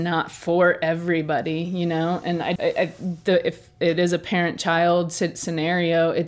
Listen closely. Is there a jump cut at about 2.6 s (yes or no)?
yes